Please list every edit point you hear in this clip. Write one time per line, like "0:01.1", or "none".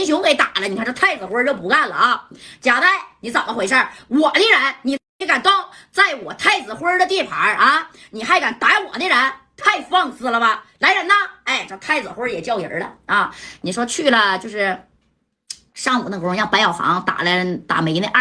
none